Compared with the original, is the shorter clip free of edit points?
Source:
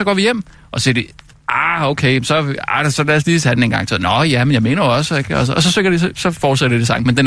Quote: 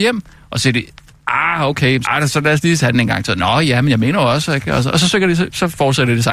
no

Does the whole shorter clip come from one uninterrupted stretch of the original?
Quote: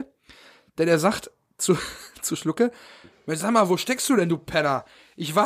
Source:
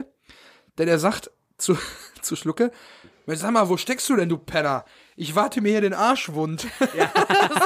yes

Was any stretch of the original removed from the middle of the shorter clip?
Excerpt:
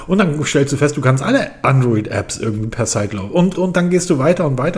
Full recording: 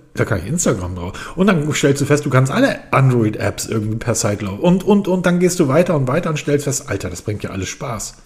yes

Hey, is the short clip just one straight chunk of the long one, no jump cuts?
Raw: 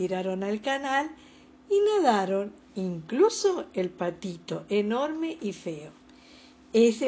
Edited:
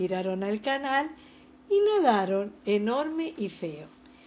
no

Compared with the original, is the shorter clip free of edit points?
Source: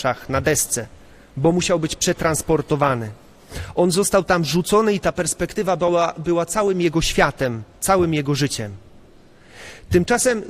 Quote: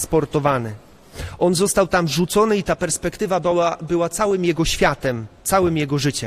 yes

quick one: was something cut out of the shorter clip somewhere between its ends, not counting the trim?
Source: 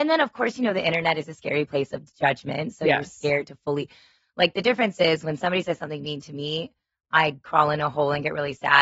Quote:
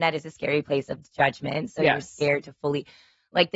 no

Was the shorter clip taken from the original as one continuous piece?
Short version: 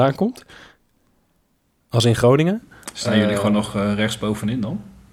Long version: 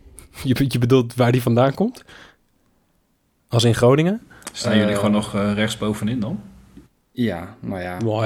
yes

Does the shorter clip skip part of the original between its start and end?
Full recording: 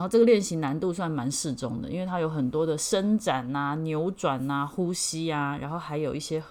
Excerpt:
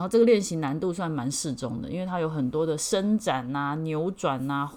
no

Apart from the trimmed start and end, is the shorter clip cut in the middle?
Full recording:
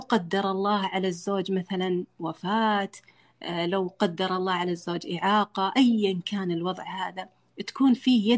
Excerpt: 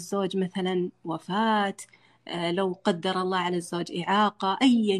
no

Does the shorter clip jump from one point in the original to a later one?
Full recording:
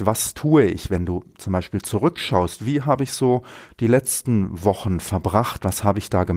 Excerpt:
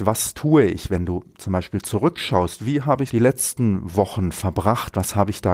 yes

